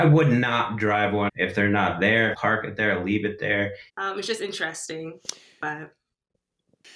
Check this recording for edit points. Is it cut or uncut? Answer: cut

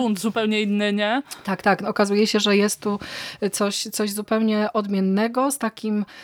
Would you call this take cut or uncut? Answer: uncut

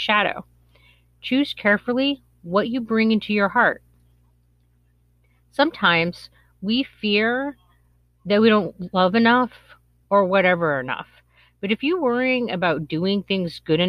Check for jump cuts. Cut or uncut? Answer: cut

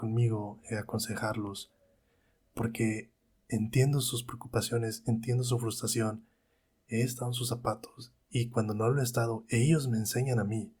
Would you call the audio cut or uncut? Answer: uncut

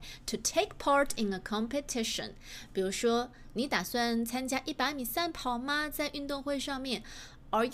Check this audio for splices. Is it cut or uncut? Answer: uncut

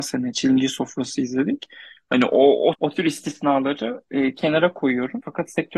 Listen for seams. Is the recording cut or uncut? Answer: uncut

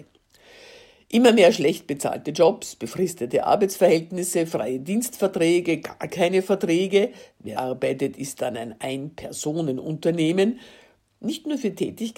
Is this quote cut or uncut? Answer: cut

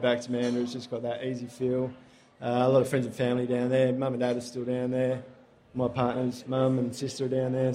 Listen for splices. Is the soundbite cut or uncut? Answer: uncut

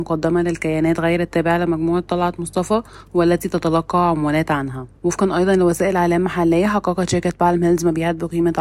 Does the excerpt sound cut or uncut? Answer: cut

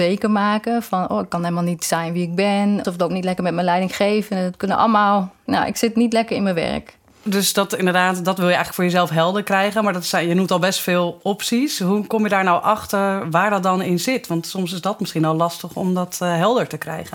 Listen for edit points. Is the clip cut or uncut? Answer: cut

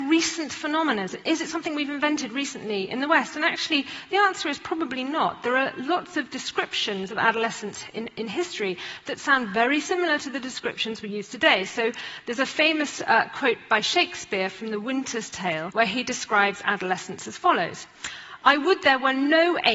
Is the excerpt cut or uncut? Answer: uncut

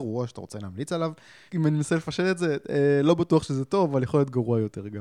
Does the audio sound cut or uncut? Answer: cut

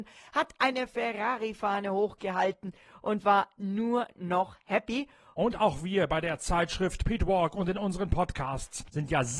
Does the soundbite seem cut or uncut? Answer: cut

